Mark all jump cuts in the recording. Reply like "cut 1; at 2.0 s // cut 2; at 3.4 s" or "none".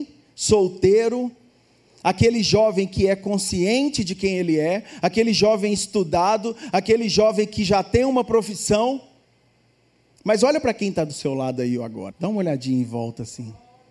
cut 1; at 10.1 s // cut 2; at 12.1 s